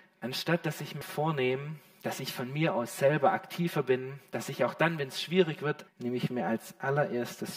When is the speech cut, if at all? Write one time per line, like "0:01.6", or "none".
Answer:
0:01.0
0:05.9